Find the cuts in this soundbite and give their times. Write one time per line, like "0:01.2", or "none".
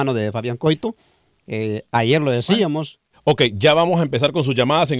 0:03.1

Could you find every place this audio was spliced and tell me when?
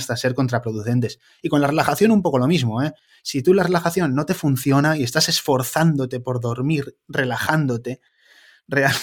none

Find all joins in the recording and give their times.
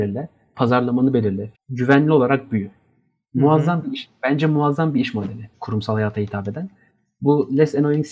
0:01.5
0:03.2
0:05.5

